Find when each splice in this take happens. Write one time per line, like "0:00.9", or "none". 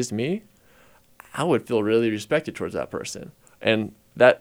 0:03.4